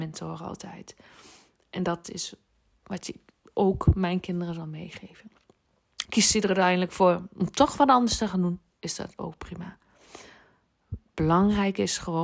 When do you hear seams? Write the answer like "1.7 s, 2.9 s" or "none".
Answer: 6.0 s